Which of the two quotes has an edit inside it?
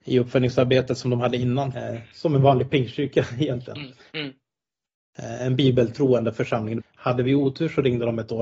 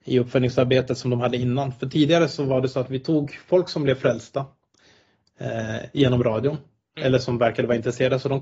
first; 3 cuts; at 1.7 s, 4.1 s, 6.8 s

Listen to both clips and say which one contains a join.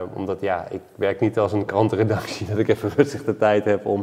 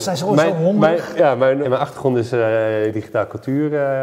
second; 2 cuts; at 1.6 s, 2.9 s

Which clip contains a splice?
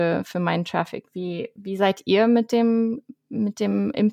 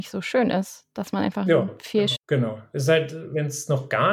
second; 1 cut; at 2.1 s

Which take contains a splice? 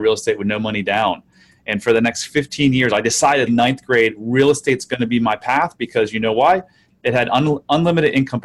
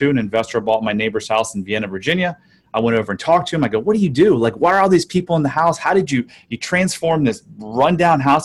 first; 1 cut; at 3.5 s

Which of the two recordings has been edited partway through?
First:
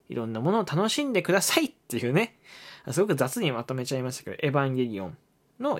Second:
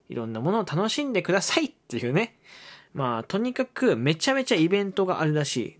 second; 1 cut; at 2.8 s

